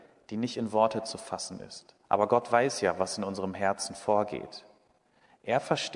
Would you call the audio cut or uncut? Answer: cut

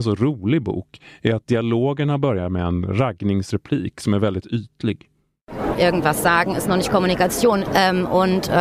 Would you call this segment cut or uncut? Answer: cut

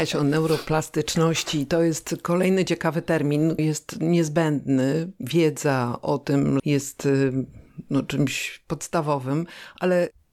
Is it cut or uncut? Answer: cut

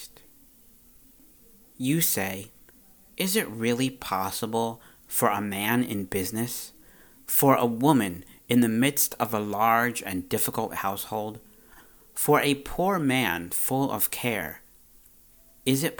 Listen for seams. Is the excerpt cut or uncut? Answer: uncut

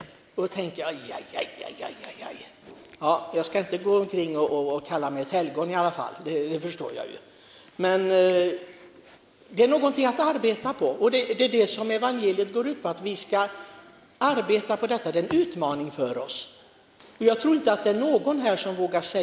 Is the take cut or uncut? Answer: uncut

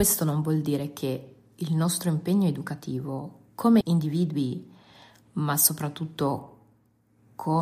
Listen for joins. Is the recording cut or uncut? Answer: cut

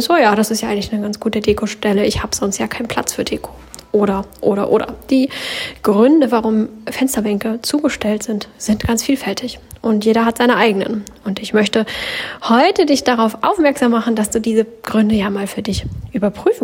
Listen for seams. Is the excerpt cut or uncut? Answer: uncut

